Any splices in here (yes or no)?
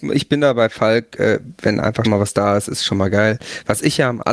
yes